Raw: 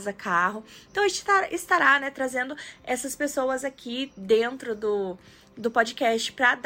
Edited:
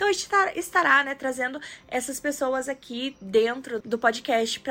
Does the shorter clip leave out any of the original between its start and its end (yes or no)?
yes